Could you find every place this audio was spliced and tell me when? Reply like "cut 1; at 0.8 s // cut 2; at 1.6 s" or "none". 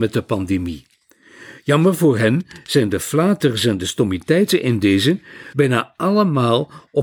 cut 1; at 5.5 s